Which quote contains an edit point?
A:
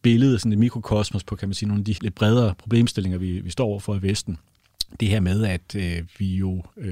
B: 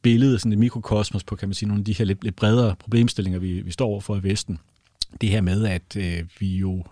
A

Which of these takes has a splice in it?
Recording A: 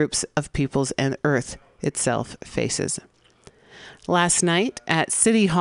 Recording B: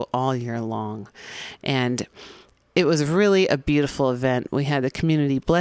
A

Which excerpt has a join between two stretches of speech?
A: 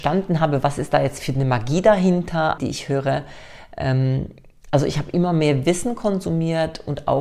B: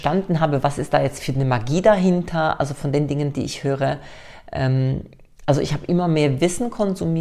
A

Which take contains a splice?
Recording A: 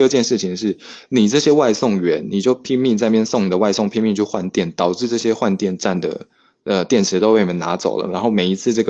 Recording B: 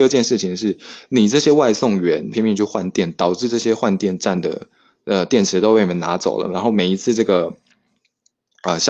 B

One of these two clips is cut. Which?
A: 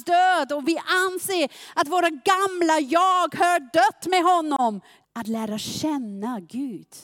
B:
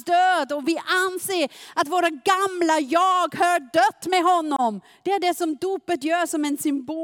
A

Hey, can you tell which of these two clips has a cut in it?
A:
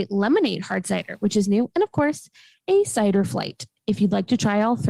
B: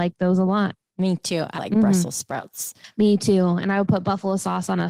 B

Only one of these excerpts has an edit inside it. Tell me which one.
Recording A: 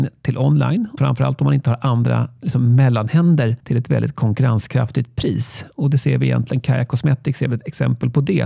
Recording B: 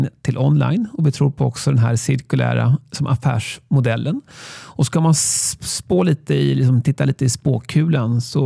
A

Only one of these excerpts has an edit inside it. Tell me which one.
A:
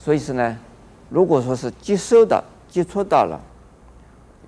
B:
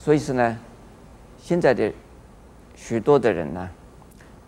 A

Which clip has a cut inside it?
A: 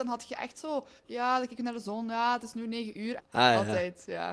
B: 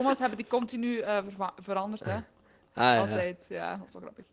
A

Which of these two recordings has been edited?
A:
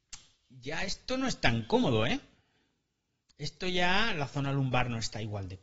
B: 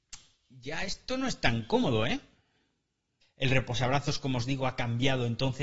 B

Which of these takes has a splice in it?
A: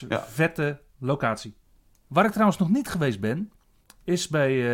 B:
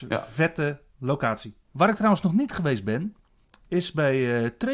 B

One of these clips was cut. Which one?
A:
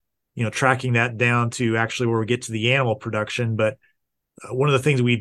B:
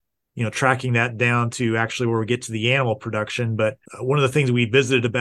B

